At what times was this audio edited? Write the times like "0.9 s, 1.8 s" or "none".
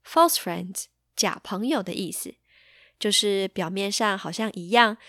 none